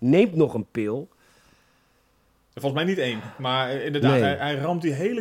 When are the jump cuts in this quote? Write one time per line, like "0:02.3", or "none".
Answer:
none

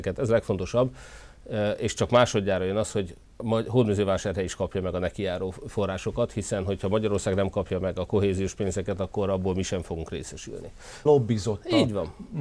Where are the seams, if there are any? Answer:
0:11.1

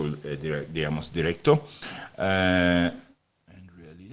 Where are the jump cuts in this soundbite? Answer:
0:02.1

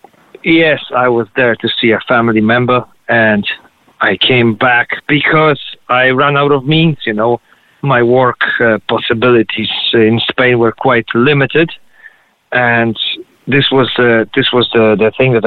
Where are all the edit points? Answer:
none

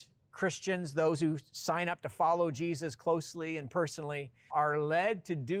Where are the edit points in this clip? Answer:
0:04.5

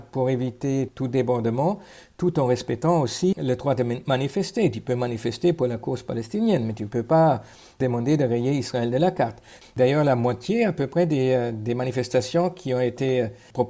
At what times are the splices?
0:03.3

